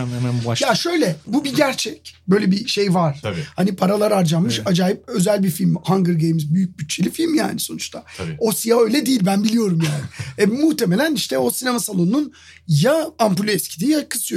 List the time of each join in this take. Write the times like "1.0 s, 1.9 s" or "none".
3.2 s